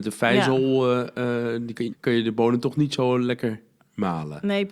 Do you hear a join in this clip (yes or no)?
yes